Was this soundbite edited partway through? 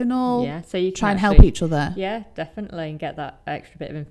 no; 0 cuts

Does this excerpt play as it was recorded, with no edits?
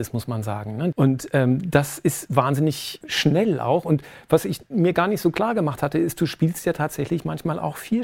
no; 2 cuts; at 0.9 s, 3.0 s

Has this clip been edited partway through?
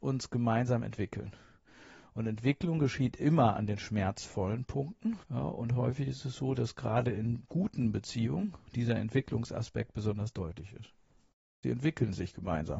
yes; 2 cuts; at 5.2 s, 11.6 s

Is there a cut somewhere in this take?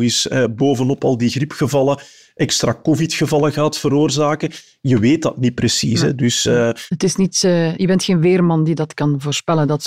no; 0 cuts

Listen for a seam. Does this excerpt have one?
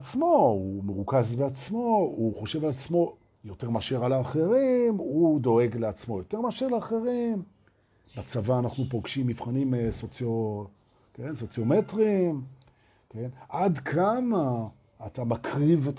no; 0 cuts

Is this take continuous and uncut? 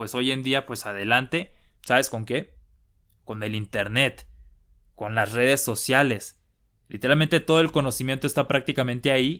no; 1 cut; at 1.8 s

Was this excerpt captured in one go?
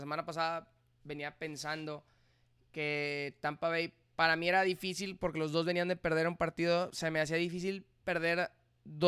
yes; 0 cuts

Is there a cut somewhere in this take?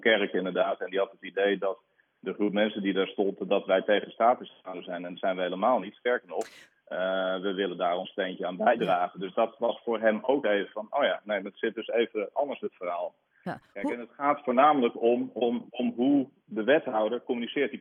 no; 0 cuts

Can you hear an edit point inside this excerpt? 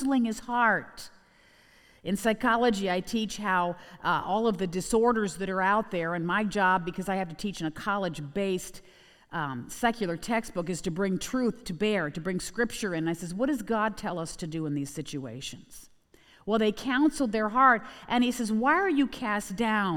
no; 0 cuts

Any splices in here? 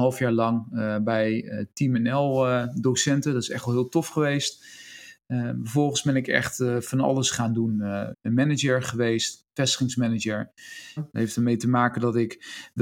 yes; 2 cuts; at 8.1 s, 11.0 s

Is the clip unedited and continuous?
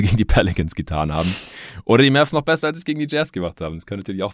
yes; 0 cuts

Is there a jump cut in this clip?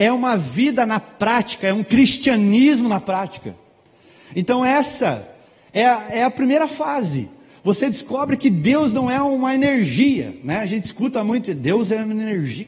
no; 0 cuts

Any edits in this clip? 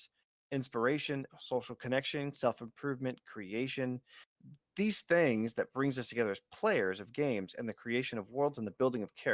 yes; 2 cuts; at 1.3 s, 2.3 s

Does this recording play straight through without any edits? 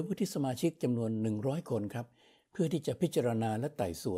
yes; 0 cuts

